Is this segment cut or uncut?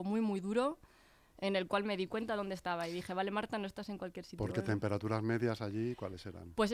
uncut